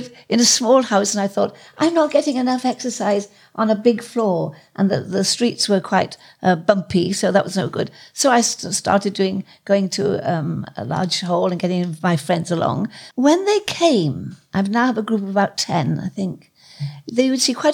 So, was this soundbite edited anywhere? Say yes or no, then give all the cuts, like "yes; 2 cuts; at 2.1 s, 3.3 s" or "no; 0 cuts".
yes; 1 cut; at 13.1 s